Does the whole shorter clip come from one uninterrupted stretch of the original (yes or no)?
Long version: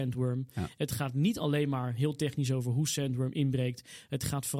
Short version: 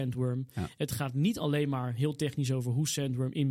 yes